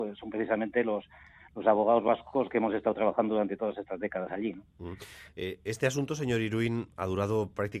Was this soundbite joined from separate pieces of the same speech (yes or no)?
no